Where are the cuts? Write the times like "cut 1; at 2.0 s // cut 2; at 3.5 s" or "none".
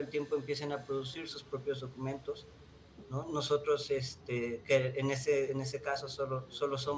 none